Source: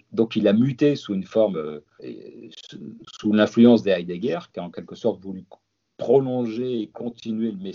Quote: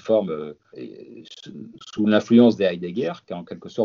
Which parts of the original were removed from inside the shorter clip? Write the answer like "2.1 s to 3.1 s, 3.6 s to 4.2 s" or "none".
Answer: none

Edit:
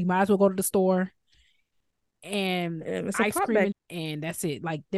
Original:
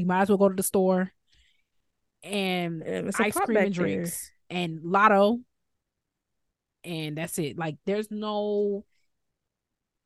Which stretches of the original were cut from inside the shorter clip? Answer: 3.7 s to 6.6 s

